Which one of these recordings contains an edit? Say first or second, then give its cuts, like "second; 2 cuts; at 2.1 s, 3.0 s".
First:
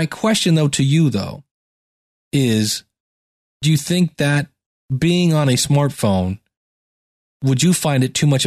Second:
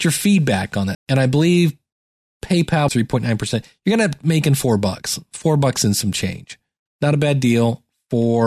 second; 3 cuts; at 0.9 s, 2.9 s, 6.9 s